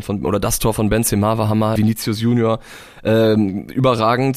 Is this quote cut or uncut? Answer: cut